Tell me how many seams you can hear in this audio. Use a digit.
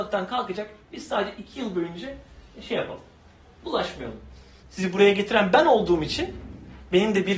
1